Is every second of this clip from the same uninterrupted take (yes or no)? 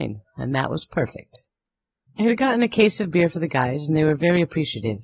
no